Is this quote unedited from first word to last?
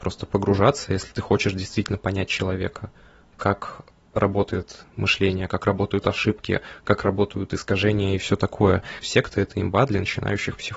no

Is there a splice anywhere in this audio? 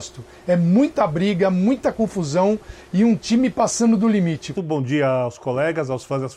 yes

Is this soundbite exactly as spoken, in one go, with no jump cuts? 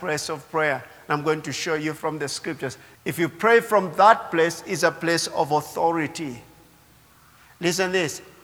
no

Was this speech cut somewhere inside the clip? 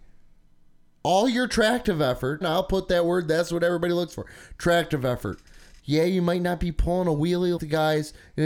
yes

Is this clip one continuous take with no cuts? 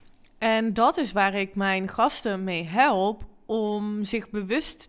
yes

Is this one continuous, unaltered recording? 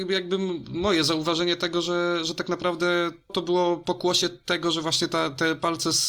no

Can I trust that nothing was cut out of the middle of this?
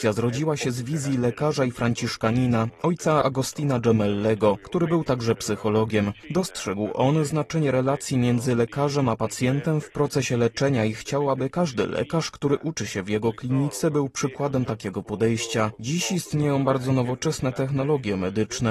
yes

